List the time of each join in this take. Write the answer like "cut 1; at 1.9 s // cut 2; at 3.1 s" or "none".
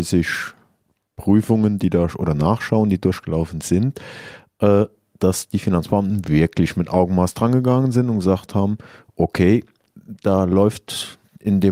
none